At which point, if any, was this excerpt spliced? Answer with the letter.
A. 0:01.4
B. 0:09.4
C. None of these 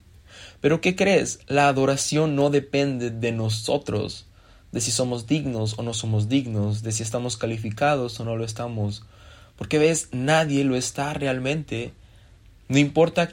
C